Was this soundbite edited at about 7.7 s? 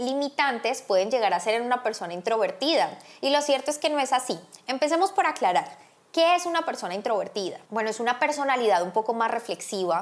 yes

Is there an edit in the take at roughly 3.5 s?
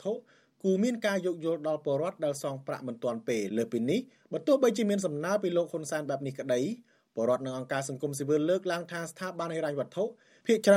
yes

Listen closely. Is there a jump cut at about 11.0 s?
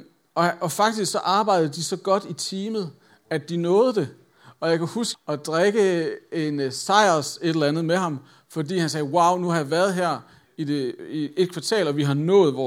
no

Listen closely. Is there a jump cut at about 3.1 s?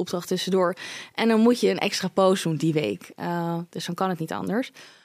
no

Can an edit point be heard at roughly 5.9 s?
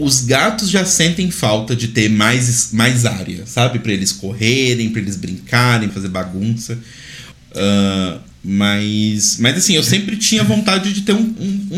yes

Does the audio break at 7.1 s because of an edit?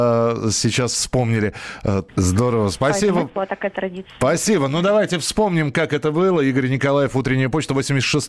no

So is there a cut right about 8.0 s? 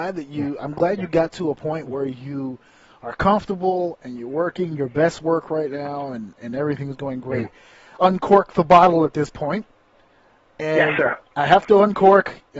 yes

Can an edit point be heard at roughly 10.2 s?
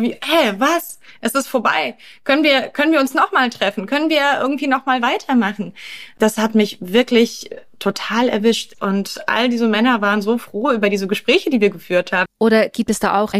no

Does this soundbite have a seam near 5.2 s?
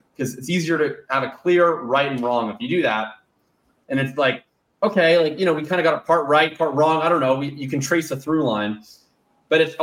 no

